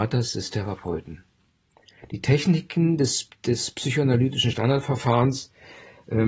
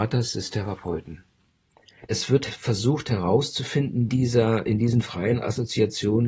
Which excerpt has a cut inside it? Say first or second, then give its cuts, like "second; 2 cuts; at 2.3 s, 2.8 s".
second; 2 cuts; at 2.1 s, 4.1 s